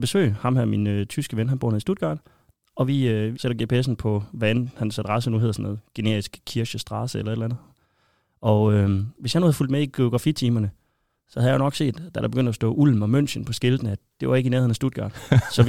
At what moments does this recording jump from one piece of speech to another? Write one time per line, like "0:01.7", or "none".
0:03.3